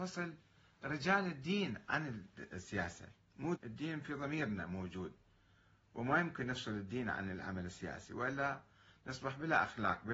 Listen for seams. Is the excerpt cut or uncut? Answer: cut